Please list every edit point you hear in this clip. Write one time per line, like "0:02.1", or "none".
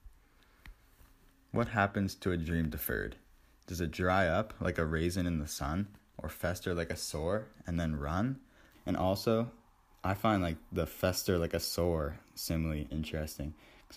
0:08.7
0:12.9